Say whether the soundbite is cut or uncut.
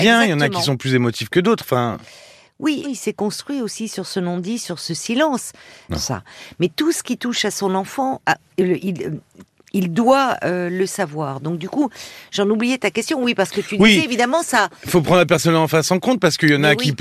cut